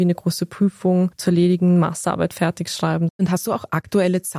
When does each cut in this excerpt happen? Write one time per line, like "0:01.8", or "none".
0:03.1